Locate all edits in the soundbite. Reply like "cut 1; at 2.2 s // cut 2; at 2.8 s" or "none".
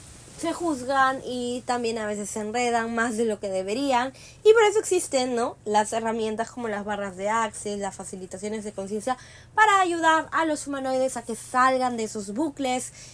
none